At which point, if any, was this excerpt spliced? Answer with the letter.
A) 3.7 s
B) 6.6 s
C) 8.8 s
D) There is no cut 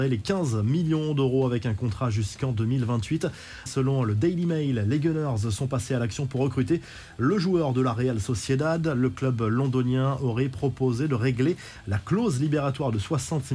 A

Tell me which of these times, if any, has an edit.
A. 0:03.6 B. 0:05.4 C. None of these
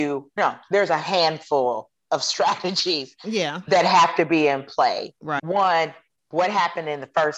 B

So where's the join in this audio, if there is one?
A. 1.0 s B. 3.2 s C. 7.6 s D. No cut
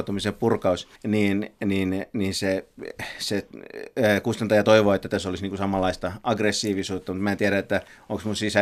A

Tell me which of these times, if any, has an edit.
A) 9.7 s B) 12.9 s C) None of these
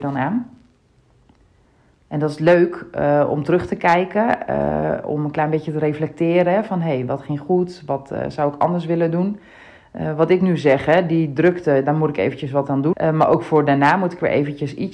B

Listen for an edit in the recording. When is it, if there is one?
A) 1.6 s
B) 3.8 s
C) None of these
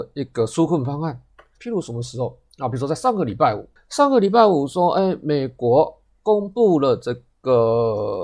A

